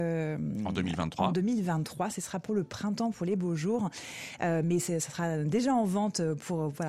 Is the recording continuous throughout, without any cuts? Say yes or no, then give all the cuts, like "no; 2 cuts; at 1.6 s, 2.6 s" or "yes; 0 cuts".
yes; 0 cuts